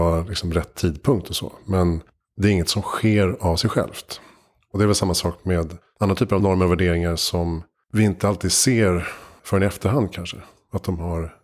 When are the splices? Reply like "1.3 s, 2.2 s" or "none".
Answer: none